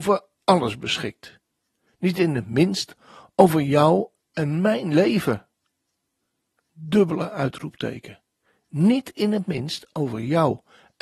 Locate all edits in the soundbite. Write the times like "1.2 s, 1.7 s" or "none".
none